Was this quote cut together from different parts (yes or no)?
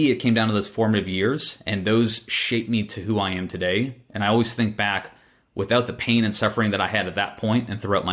no